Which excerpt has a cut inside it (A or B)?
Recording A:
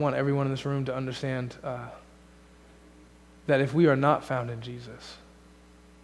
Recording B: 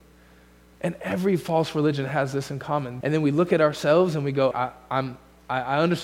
B